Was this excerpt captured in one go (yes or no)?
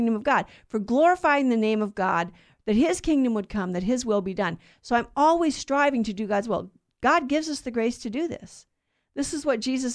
yes